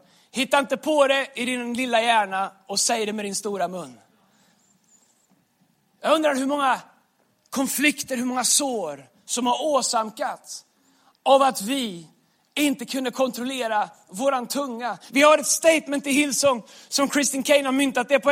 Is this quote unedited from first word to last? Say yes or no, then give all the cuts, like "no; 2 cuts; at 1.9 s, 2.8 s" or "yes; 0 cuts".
no; 1 cut; at 15.1 s